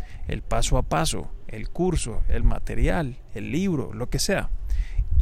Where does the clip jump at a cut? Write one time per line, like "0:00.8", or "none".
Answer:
none